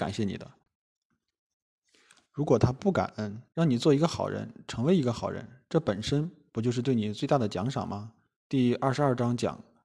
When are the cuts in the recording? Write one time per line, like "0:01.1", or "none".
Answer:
0:03.5
0:08.3